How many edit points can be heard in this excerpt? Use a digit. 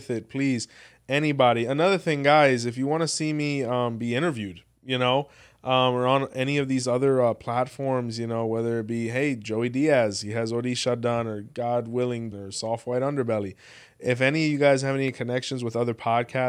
1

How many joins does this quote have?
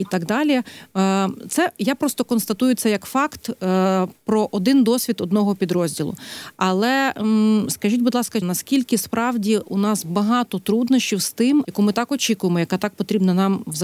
2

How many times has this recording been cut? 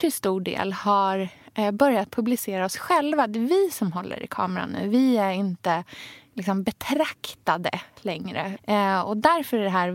1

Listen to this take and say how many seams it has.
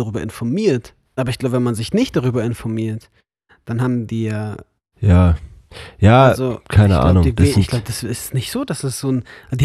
2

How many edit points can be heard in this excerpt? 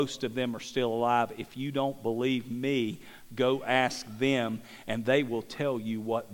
0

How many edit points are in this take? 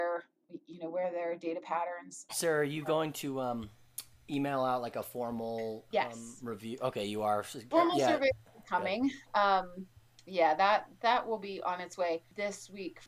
1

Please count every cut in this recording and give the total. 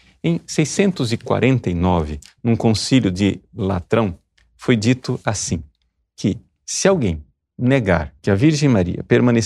1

